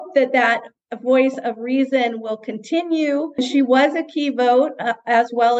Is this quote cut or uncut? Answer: uncut